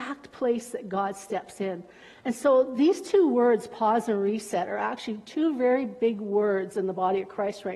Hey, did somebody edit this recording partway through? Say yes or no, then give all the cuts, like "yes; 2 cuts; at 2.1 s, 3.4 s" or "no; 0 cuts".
no; 0 cuts